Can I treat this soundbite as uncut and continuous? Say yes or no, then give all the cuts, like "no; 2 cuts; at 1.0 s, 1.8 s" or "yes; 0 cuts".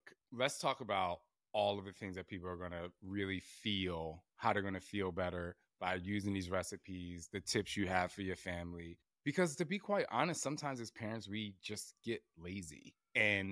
yes; 0 cuts